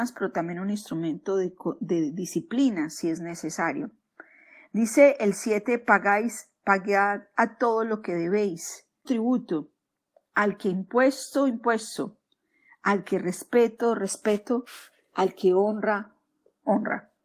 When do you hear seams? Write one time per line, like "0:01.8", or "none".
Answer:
0:09.1